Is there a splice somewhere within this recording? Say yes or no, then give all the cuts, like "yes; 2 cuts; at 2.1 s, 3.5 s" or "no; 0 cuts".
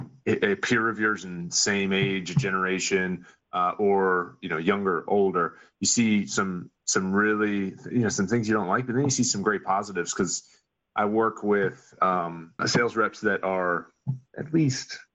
yes; 1 cut; at 12.6 s